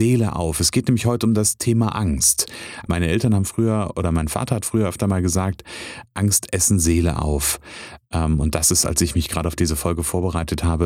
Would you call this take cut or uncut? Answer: cut